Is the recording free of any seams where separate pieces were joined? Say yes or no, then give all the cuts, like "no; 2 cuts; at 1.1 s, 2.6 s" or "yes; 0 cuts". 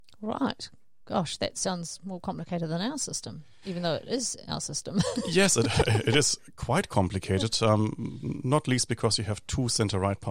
yes; 0 cuts